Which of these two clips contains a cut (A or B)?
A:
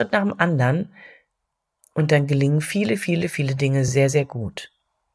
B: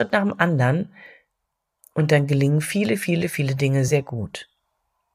B